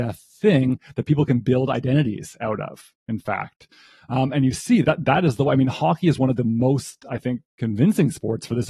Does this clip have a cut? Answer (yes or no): yes